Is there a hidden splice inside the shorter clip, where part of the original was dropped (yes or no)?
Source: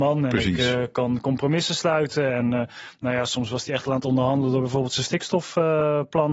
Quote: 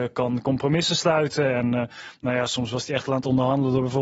no